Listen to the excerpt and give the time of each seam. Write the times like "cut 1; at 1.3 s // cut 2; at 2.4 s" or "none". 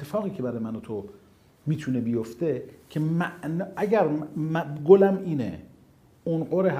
none